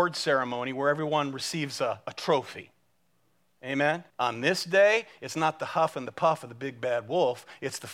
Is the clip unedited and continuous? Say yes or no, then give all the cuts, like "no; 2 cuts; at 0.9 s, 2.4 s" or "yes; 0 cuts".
no; 1 cut; at 4.1 s